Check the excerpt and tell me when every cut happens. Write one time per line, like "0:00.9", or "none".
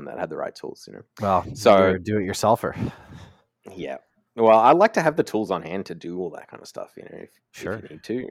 0:01.1